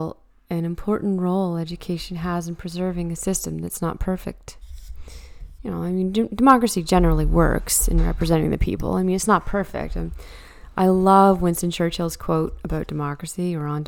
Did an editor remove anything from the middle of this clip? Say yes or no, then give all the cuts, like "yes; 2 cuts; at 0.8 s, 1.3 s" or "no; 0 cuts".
no; 0 cuts